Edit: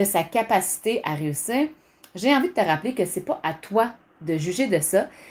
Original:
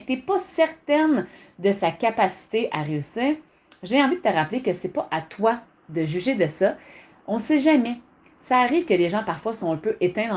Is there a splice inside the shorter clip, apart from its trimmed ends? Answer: no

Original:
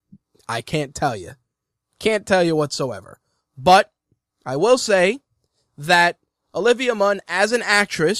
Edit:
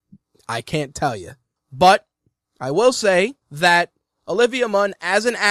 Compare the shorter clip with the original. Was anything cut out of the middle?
yes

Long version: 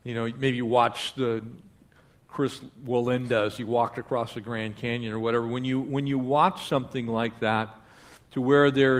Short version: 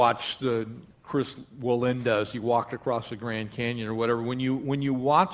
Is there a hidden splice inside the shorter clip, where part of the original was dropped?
yes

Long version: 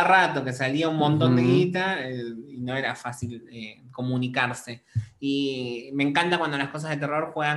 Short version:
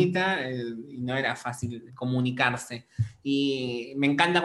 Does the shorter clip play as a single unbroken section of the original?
no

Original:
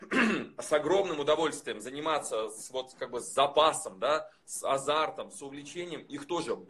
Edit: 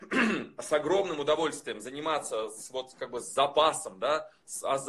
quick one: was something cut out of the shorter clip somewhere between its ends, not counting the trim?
no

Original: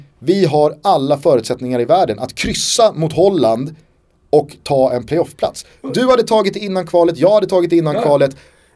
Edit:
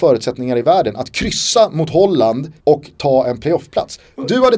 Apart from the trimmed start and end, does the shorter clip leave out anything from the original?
yes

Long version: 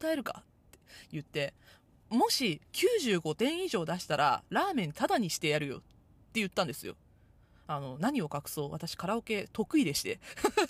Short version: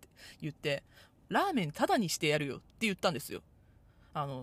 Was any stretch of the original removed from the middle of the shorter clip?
yes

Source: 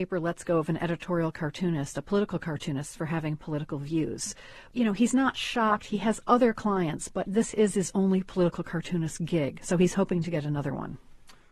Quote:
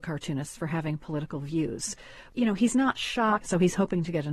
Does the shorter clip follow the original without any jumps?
no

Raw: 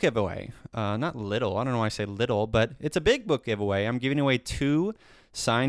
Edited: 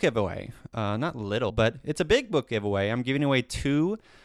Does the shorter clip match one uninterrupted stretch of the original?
no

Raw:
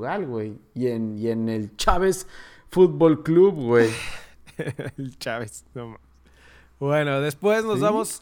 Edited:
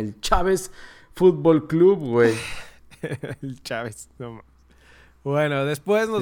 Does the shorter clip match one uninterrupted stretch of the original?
yes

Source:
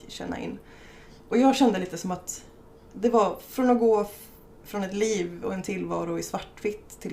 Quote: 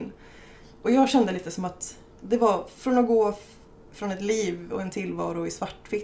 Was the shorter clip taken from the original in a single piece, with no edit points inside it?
no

